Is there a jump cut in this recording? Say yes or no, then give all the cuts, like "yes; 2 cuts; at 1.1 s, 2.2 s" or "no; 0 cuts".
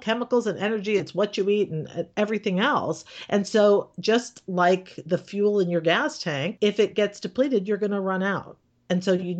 no; 0 cuts